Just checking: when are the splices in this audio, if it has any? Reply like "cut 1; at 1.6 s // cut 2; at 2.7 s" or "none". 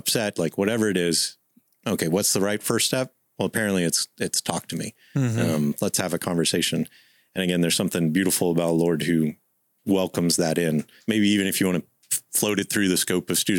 cut 1; at 11.0 s